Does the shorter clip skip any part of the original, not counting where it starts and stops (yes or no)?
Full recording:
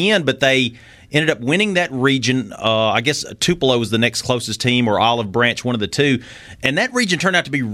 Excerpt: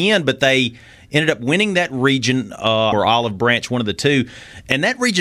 yes